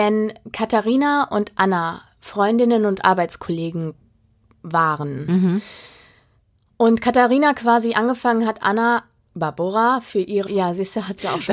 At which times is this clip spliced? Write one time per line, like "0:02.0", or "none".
0:10.5